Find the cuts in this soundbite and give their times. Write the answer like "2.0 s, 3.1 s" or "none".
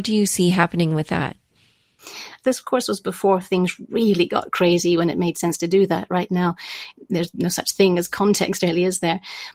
2.4 s